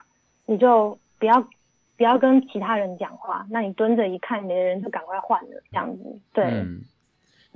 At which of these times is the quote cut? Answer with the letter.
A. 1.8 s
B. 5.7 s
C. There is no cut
B